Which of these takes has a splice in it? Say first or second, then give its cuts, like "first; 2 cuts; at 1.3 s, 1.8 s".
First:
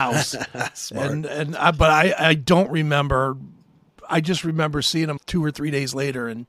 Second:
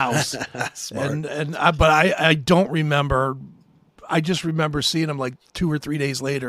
first; 1 cut; at 5.2 s